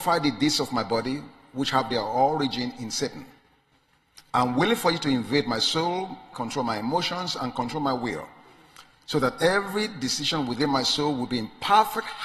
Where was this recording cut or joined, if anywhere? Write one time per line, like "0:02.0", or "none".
0:06.3